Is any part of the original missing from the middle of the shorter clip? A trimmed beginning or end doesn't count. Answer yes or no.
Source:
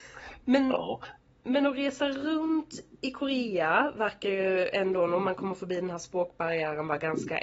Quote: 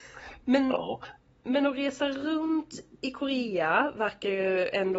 no